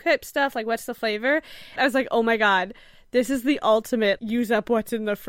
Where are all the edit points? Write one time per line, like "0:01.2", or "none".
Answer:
0:01.8
0:04.2